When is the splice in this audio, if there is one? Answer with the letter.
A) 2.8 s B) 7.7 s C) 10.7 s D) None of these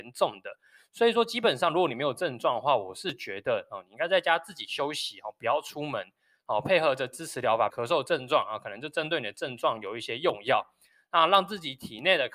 B